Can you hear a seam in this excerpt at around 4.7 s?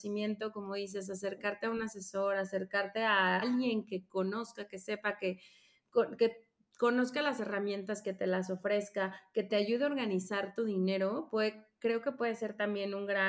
no; 1 cut; at 3.4 s

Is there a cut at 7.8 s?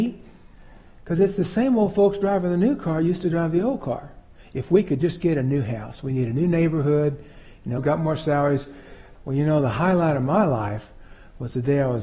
yes; 2 cuts; at 7.8 s, 9.1 s

